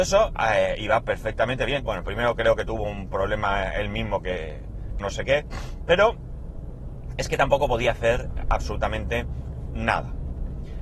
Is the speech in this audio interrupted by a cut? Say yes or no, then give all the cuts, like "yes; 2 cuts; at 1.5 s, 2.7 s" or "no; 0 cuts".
yes; 2 cuts; at 1.8 s, 5.0 s